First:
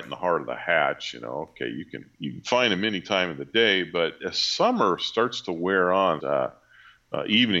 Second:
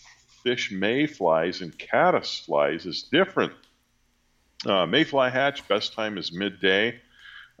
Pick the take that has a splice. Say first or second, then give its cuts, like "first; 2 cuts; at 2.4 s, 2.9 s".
first; 3 cuts; at 2.1 s, 4.2 s, 6.2 s